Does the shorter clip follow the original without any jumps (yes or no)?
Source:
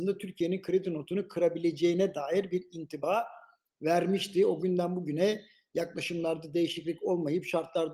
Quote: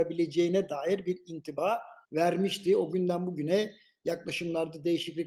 no